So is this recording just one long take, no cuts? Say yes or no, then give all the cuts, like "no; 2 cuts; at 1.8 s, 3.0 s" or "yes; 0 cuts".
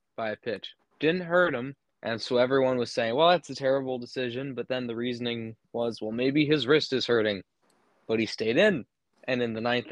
no; 1 cut; at 1.9 s